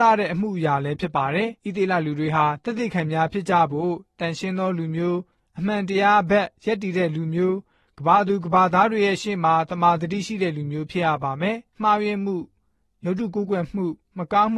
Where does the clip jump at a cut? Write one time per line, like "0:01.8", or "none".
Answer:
0:01.6
0:11.7